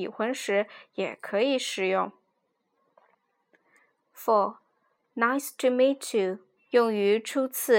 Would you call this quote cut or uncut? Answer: cut